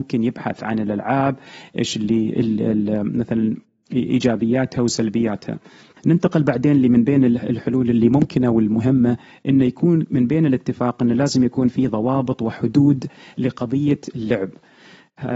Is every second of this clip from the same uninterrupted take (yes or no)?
no